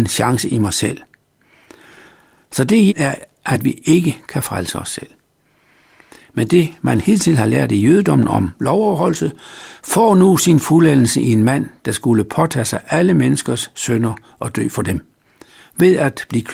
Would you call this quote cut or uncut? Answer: cut